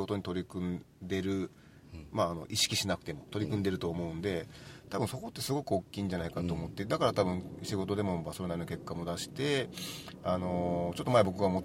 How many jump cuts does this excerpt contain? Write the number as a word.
one